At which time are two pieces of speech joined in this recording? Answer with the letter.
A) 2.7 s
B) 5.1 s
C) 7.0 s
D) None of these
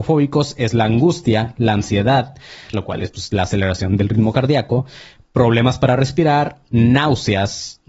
A